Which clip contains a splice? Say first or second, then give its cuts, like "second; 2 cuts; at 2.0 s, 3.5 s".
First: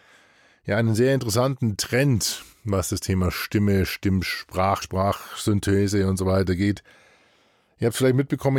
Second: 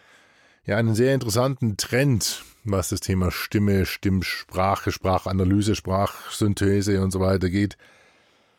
first; 1 cut; at 4.8 s